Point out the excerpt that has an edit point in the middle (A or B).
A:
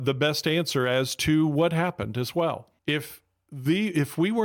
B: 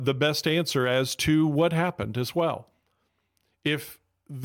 A